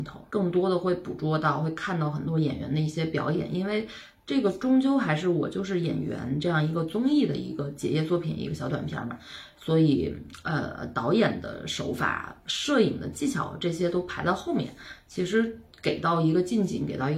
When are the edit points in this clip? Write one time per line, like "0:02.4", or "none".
none